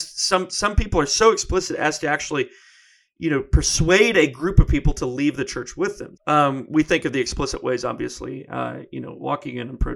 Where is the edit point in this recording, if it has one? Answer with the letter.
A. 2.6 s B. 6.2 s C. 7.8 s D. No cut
B